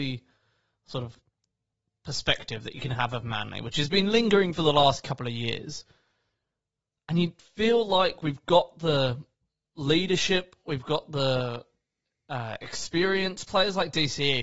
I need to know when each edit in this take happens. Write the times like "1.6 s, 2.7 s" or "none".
none